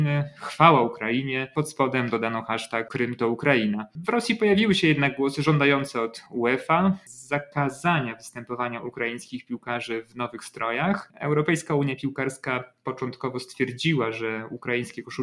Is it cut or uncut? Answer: uncut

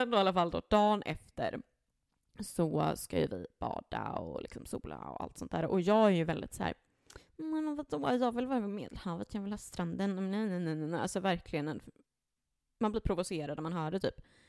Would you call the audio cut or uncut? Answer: uncut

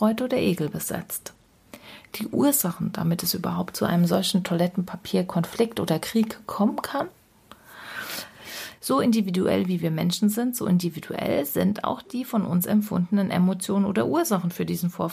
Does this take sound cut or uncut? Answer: cut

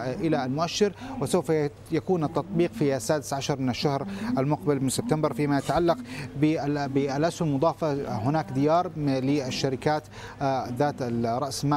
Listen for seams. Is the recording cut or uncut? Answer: uncut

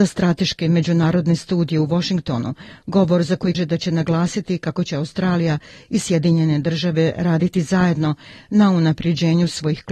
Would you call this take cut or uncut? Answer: cut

